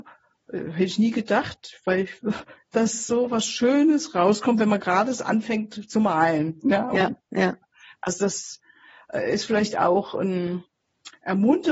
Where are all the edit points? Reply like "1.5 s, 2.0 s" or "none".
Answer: none